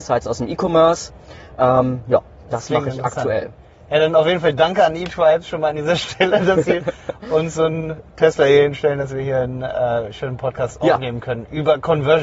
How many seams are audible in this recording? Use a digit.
0